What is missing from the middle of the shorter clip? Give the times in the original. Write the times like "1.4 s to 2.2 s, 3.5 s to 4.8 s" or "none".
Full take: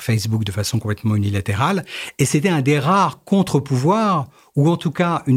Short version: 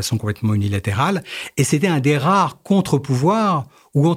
none